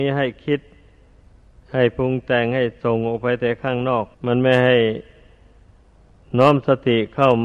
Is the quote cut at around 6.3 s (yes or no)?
no